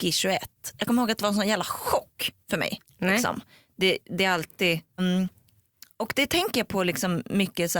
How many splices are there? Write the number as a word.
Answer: two